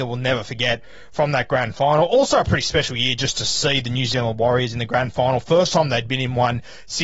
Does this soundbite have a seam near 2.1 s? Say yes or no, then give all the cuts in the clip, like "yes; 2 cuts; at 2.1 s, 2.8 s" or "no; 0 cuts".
no; 0 cuts